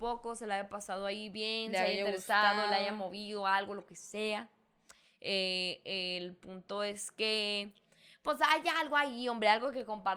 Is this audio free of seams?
yes; 0 cuts

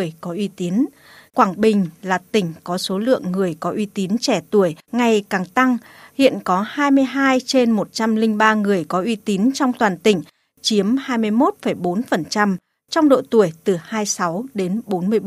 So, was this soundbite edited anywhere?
yes; 2 cuts; at 1.3 s, 4.8 s

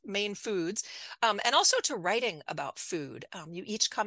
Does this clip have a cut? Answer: no; 0 cuts

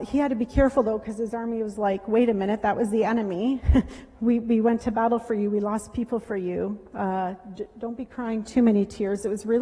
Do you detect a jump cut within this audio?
no; 0 cuts

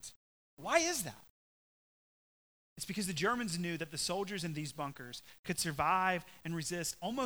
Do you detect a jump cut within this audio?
no; 0 cuts

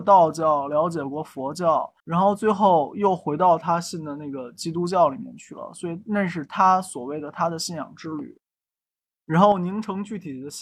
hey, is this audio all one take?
no; 2 cuts; at 2.0 s, 9.2 s

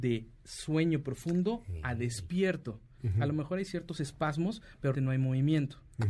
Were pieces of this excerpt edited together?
yes; 2 cuts; at 3.0 s, 4.9 s

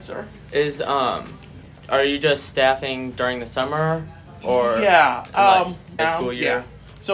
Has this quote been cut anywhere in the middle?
yes; 1 cut; at 6.0 s

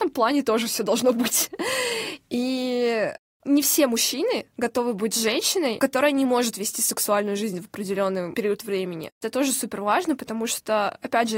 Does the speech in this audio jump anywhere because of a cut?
no; 0 cuts

